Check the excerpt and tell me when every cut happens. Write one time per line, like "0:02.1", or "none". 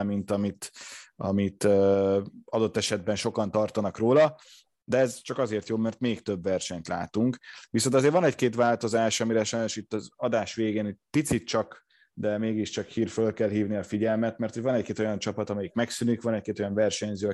none